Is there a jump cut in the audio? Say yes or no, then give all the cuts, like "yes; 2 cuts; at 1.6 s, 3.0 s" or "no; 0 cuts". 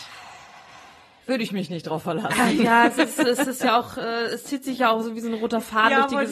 no; 0 cuts